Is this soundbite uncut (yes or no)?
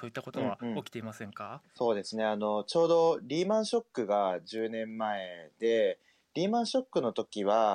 no